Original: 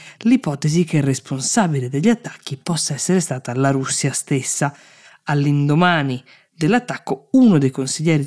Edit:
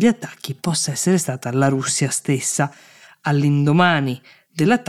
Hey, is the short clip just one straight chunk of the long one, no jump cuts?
yes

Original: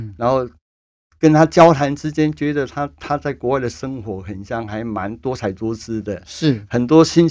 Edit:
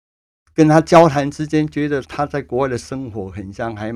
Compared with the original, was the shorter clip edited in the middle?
yes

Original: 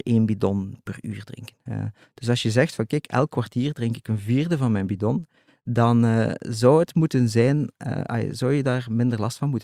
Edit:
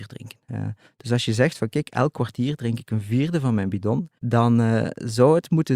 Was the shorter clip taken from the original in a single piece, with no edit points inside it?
no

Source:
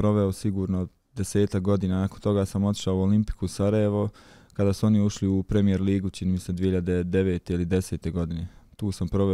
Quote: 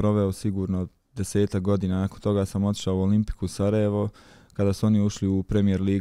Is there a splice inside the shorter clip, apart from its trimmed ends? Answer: no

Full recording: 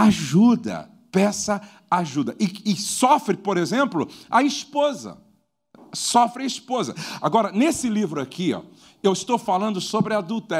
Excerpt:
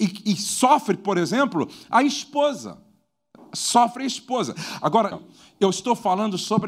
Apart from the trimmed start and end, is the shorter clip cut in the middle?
yes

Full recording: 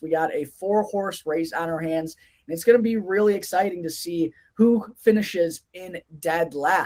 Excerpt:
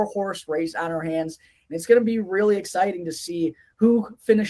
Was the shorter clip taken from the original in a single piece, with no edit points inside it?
yes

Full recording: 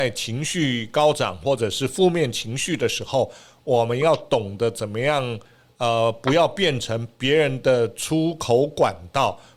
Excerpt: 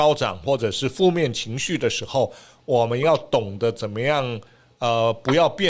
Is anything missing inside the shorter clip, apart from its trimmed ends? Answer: no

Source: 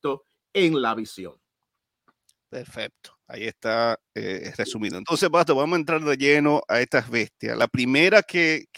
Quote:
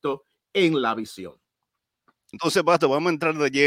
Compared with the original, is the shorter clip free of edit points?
no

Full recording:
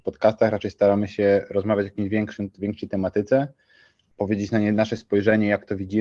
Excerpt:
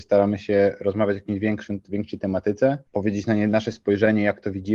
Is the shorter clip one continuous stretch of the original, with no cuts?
no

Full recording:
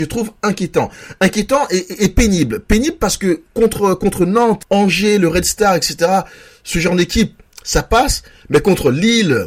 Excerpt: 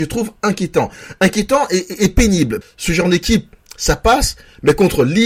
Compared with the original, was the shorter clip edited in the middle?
yes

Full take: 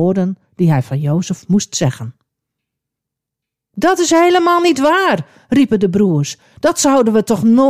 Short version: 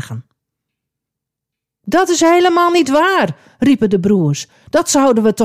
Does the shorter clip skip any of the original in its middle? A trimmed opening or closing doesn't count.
no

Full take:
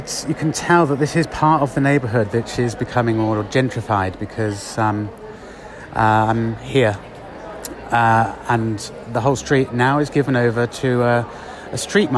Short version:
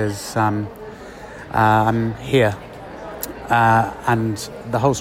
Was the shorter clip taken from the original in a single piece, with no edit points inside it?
yes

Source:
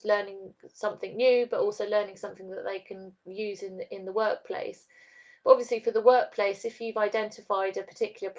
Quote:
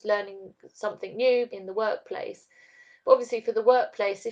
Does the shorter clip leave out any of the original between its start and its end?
yes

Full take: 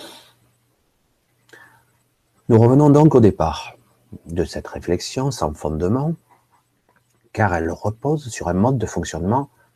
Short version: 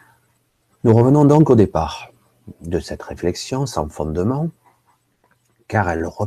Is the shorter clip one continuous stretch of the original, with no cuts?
yes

